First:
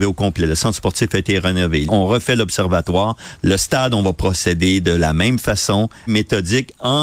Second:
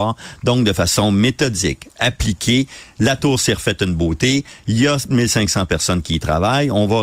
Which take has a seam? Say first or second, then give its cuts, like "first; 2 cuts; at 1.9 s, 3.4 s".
first; 3 cuts; at 1.9 s, 3.4 s, 6.1 s